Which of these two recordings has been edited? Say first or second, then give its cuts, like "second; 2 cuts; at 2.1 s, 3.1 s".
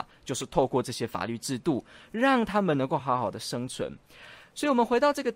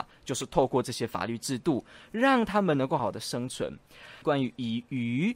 second; 2 cuts; at 3.0 s, 4.2 s